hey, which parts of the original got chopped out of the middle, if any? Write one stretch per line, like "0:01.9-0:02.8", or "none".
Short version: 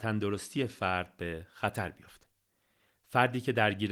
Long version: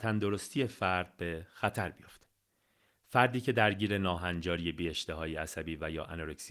none

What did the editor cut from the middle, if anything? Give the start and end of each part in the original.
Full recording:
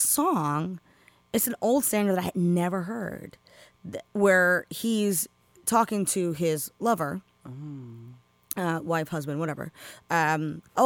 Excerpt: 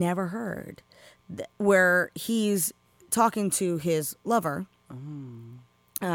none

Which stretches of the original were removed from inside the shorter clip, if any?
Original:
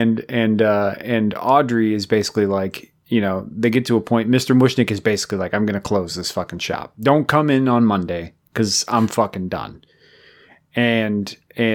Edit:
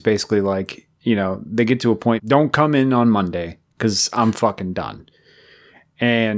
0:04.2-0:06.9

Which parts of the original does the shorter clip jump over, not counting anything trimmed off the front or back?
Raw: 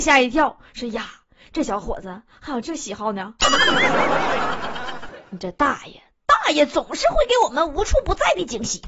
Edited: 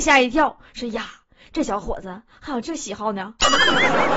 none

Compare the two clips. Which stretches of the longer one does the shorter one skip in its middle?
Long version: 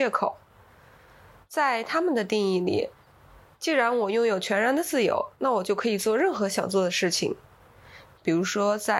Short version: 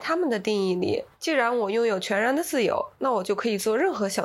0:03.0-0:03.5

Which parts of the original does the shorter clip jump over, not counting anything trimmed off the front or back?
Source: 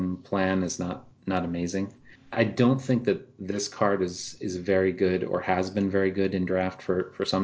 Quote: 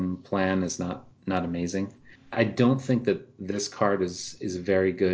none

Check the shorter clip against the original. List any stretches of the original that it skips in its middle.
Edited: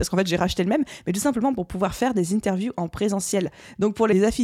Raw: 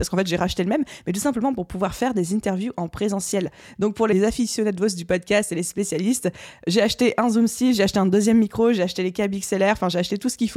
none

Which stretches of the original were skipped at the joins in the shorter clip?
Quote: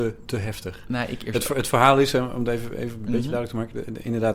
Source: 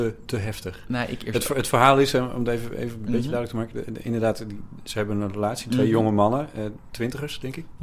none

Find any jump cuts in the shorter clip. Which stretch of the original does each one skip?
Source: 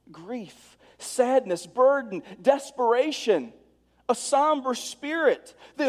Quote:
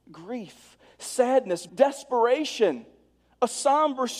0:01.7-0:02.4

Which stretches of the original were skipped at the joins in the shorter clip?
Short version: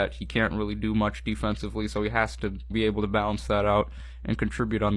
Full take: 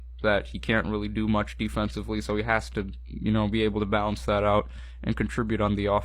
0:03.0-0:03.5

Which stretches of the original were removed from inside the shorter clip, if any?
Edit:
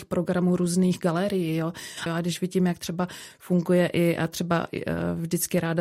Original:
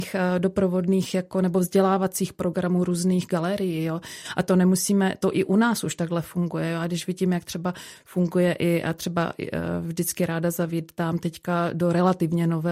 0:04.3-0:06.7

